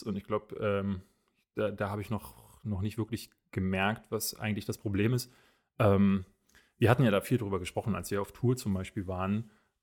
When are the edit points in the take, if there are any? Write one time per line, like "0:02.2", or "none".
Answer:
none